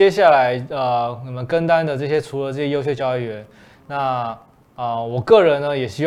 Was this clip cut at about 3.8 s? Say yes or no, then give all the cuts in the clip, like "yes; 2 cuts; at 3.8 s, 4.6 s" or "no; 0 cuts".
no; 0 cuts